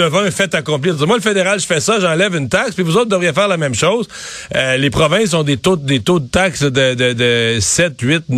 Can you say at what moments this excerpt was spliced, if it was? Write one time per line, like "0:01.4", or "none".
none

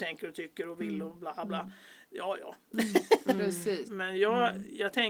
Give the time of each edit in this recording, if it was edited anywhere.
0:03.8

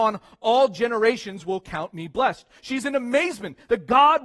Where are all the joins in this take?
0:02.6

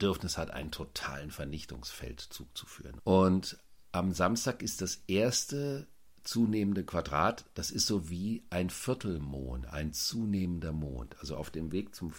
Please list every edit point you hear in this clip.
0:03.0

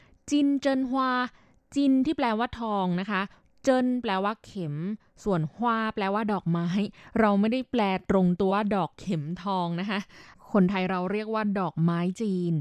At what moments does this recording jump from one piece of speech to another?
0:08.5

